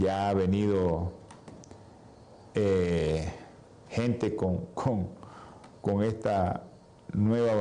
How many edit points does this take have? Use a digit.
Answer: 0